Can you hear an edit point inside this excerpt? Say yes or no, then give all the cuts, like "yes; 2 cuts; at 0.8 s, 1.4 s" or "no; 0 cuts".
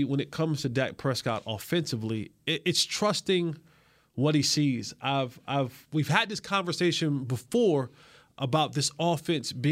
no; 0 cuts